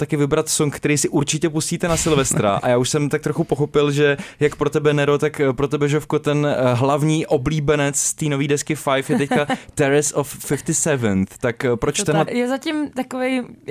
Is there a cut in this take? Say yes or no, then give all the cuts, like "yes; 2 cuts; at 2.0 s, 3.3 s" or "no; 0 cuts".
yes; 1 cut; at 12.3 s